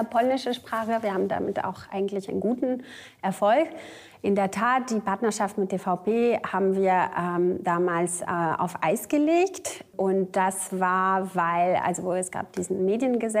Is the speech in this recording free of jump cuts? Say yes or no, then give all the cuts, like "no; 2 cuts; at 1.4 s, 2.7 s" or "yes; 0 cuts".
yes; 0 cuts